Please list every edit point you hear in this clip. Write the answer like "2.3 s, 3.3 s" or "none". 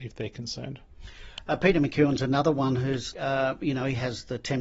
3.1 s